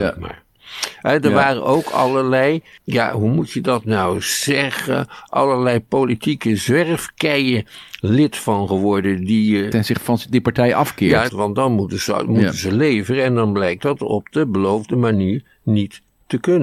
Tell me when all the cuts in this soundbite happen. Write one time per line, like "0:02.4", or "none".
0:09.7
0:11.3